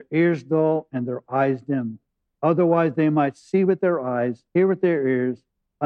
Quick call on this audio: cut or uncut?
cut